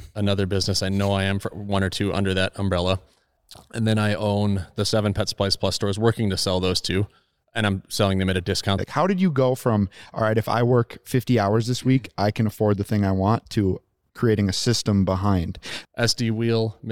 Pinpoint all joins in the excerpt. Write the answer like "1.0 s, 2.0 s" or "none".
8.8 s, 15.8 s